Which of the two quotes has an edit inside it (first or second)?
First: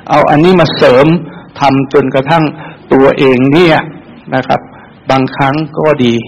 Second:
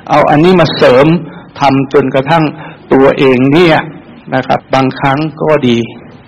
second